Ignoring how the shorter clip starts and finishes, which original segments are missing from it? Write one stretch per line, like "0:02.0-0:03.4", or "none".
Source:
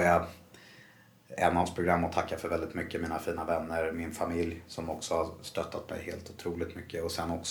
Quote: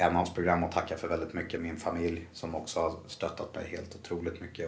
0:03.0-0:03.9